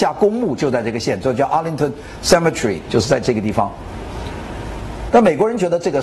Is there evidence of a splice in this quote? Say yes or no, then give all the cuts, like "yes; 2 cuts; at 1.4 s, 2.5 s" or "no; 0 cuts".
yes; 1 cut; at 5.1 s